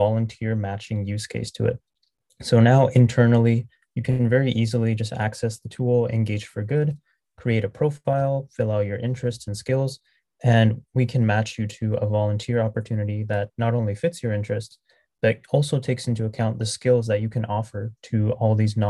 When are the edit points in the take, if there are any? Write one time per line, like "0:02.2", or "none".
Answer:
none

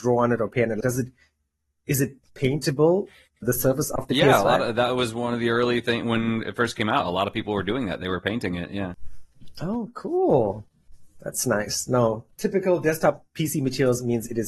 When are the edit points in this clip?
none

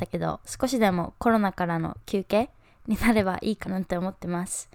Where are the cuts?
0:03.6

